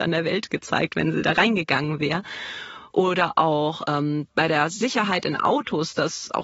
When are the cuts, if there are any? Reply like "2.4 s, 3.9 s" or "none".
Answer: 2.9 s